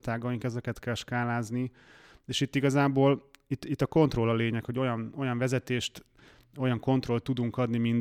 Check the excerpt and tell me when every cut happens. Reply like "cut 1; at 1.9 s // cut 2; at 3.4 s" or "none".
none